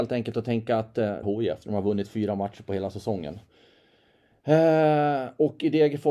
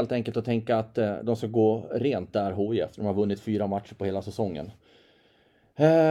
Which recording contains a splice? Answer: first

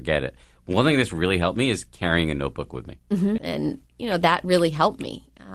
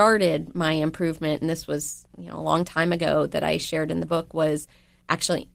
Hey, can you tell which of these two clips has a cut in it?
first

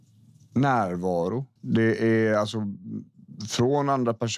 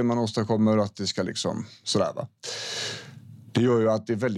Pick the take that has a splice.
first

